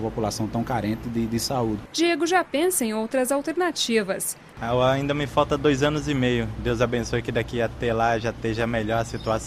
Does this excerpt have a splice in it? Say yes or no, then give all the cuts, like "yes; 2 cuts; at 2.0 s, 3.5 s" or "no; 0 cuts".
yes; 2 cuts; at 4.5 s, 6.6 s